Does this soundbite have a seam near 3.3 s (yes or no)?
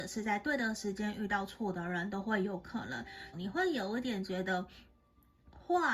yes